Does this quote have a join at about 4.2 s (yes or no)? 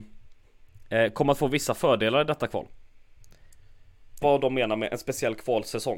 yes